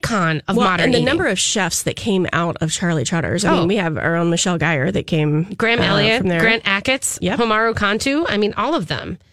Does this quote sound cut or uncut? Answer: uncut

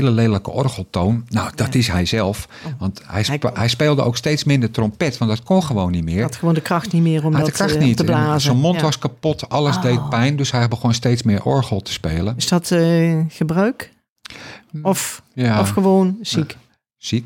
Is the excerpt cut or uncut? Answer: uncut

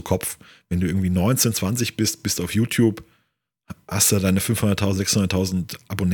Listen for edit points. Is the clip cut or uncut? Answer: uncut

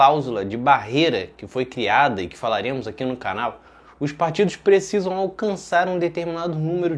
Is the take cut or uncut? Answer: uncut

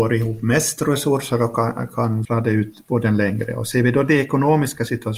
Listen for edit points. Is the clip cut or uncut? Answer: cut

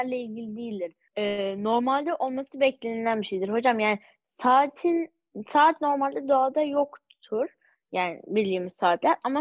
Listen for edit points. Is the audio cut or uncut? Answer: uncut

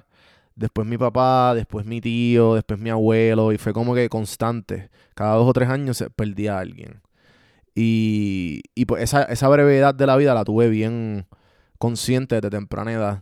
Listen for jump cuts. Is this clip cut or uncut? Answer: uncut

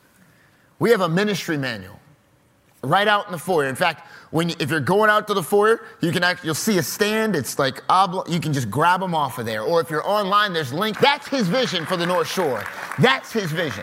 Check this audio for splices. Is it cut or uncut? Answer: cut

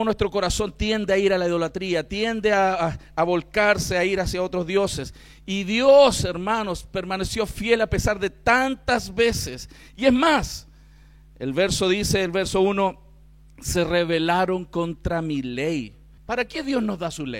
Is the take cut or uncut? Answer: cut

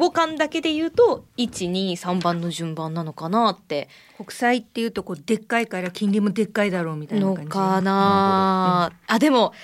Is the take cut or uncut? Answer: cut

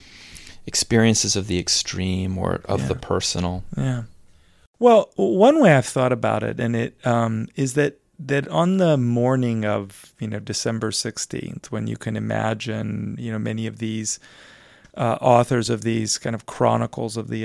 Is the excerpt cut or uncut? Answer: uncut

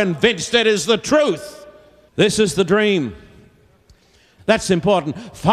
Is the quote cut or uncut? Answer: cut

